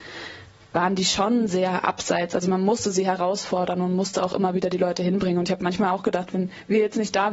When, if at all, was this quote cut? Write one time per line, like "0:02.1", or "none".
none